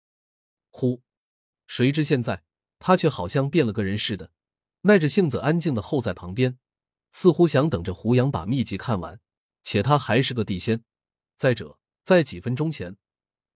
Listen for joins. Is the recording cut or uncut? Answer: cut